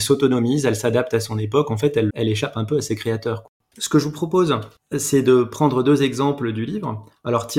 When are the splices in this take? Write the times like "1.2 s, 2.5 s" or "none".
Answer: 2.1 s